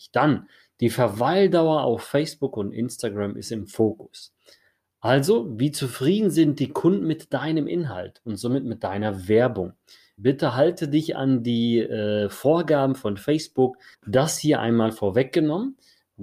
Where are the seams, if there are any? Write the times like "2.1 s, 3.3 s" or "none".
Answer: 10.2 s, 13.9 s